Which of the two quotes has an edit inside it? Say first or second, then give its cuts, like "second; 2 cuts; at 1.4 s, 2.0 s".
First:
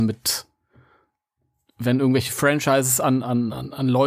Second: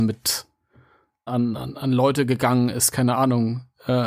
second; 1 cut; at 1.3 s